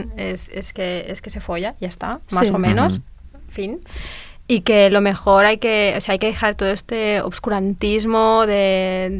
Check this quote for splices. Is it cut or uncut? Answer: uncut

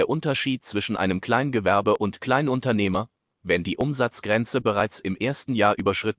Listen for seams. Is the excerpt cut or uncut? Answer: cut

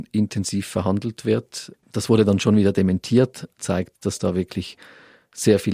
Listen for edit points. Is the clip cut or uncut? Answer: cut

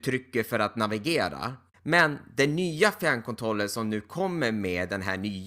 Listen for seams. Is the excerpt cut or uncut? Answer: cut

